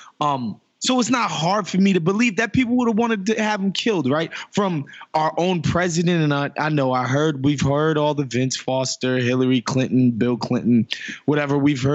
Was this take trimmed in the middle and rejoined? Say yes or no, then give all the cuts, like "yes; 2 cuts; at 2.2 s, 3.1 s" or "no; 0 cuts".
no; 0 cuts